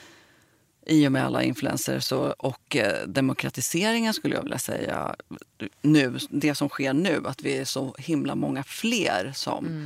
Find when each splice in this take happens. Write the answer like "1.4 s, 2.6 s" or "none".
none